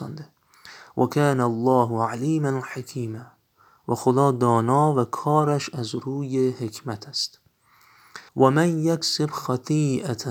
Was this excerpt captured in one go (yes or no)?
no